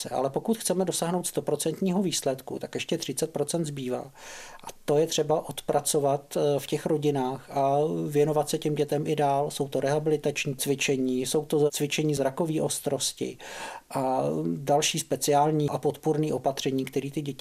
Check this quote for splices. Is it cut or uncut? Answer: uncut